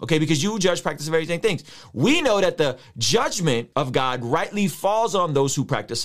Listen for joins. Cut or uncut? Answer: cut